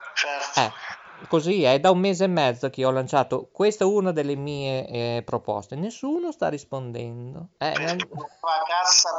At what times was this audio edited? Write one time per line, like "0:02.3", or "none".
0:07.6